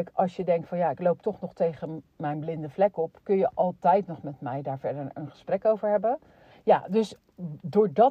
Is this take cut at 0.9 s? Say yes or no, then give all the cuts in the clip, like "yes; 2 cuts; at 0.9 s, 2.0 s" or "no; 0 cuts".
no; 1 cut; at 6.5 s